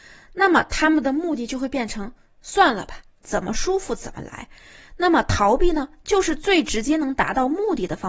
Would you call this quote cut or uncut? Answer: uncut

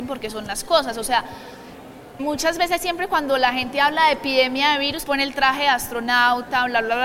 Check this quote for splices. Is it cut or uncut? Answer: cut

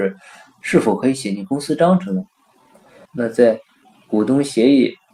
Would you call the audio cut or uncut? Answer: cut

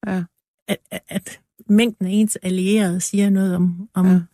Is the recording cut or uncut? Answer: uncut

